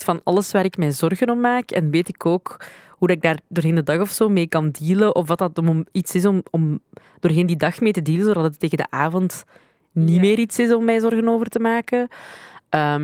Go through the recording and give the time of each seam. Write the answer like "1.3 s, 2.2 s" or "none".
none